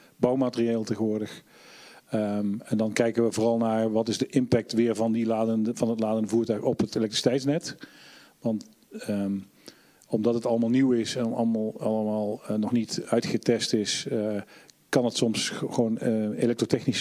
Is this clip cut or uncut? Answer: uncut